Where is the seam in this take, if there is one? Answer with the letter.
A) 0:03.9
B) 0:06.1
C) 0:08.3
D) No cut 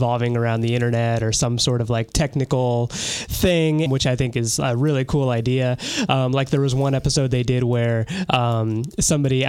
A